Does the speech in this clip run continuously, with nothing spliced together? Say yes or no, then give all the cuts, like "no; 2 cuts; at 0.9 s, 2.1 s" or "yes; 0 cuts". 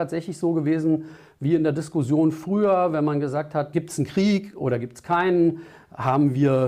no; 1 cut; at 3.7 s